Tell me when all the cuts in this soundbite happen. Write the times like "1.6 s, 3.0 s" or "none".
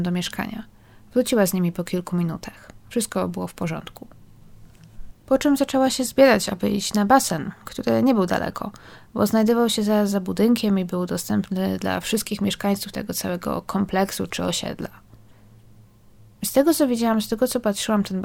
none